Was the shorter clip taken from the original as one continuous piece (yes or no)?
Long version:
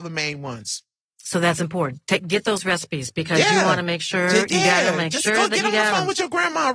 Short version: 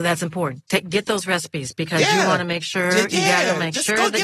yes